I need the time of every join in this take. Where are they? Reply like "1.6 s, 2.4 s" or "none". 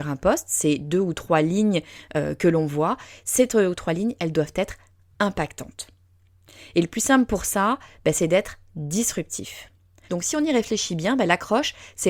10.1 s